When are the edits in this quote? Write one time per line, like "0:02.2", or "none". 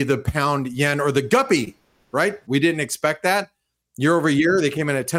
0:02.4